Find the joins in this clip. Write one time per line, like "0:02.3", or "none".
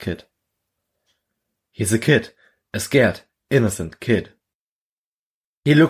0:01.6

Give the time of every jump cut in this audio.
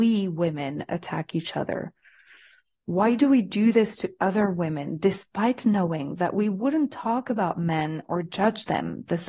0:02.7

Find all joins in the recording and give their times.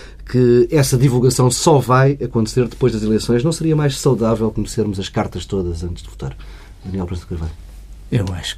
none

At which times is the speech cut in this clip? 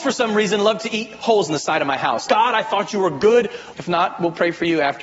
0:02.3
0:03.7

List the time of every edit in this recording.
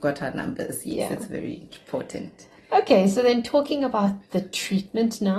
none

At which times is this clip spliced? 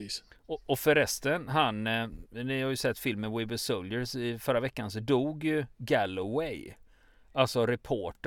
none

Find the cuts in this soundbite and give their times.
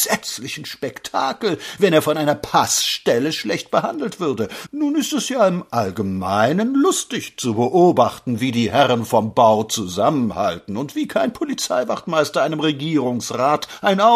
0:04.7

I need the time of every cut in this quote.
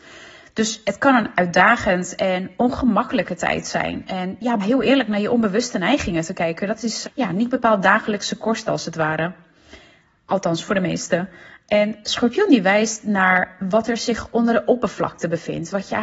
0:04.6
0:07.0

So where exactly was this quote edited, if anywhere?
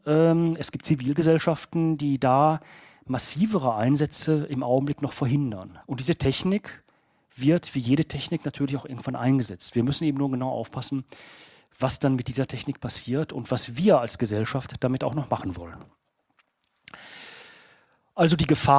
0:05.8

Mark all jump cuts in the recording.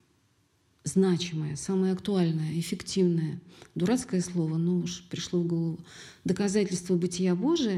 none

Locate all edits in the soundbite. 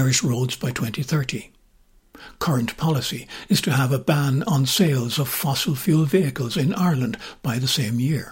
none

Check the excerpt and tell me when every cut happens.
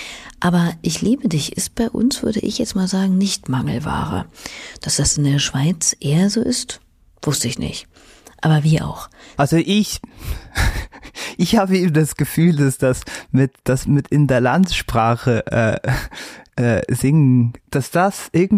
0:09.4

